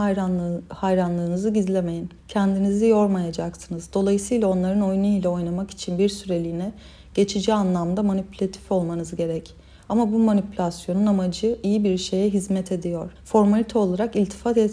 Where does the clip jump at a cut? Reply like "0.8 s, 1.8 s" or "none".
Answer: 2.2 s, 13.2 s